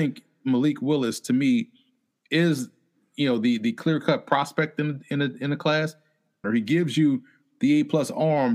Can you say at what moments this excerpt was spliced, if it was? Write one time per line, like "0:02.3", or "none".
0:06.4